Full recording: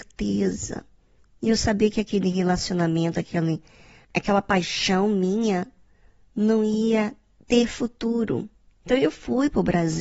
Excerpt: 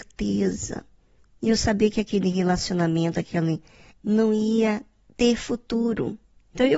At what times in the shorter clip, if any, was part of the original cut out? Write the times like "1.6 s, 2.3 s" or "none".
3.9 s